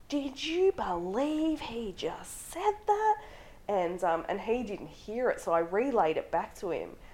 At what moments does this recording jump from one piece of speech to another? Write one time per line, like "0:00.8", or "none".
none